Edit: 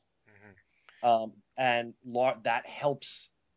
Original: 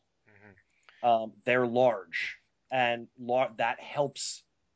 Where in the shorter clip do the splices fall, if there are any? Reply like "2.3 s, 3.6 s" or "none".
1.4 s